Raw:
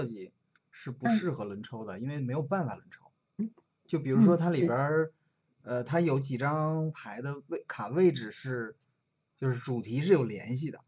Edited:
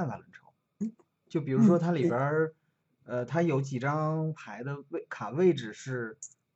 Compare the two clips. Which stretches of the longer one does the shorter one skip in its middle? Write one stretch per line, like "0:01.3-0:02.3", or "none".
none